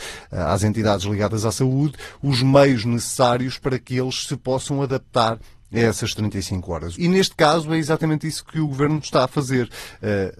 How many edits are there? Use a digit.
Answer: 1